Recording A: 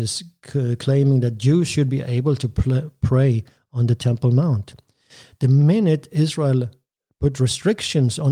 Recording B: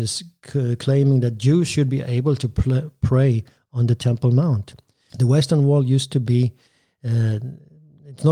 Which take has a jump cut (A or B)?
B